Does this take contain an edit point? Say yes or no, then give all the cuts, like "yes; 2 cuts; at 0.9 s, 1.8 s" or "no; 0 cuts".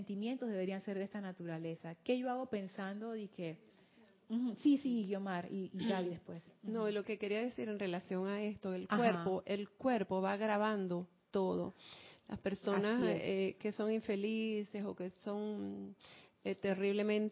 no; 0 cuts